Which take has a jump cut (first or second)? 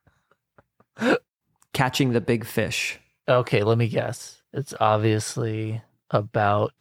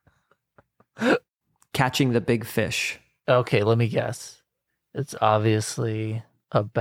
first